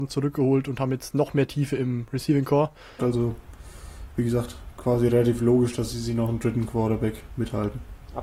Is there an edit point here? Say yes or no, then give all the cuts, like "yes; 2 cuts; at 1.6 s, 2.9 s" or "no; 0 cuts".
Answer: yes; 1 cut; at 3.0 s